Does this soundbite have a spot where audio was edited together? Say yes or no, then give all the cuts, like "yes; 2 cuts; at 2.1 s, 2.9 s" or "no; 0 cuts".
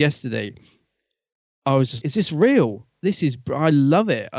yes; 1 cut; at 2.0 s